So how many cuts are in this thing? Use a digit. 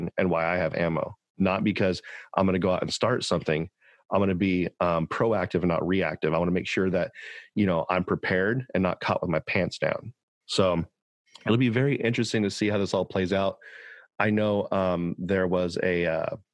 1